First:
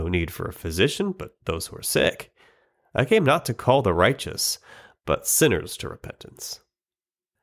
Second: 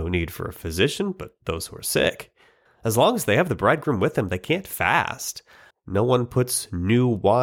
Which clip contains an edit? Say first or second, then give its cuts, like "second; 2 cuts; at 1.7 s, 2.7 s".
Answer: second; 2 cuts; at 2.7 s, 5.7 s